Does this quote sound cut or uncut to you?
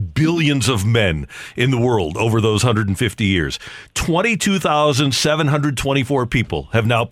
uncut